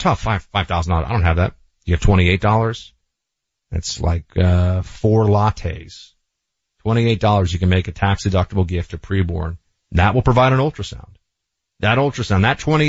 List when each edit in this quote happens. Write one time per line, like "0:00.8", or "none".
none